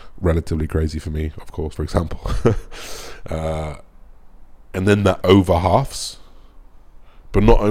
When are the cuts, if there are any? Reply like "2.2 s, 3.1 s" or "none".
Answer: 1.8 s, 5.2 s